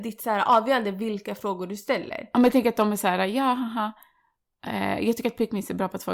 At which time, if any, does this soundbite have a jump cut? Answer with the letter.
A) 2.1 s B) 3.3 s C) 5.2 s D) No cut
D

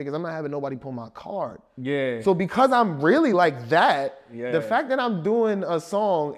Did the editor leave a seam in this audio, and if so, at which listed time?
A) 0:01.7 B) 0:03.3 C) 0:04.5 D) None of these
D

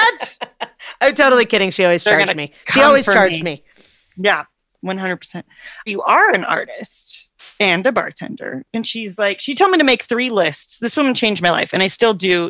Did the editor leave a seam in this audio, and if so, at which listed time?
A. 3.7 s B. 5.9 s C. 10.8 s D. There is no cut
B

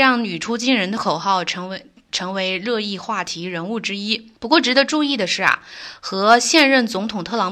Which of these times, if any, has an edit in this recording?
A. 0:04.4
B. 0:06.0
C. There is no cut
A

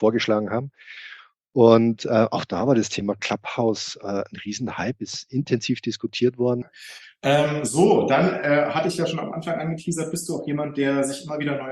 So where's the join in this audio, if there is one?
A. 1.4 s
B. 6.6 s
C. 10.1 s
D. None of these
B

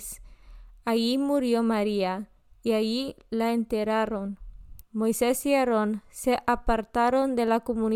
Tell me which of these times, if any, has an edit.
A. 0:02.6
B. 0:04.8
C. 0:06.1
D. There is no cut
B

